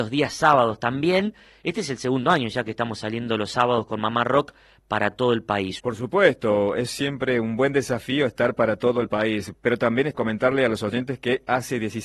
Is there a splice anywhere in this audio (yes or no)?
yes